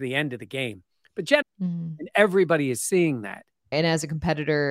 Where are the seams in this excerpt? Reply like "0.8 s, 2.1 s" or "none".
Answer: 1.4 s, 3.7 s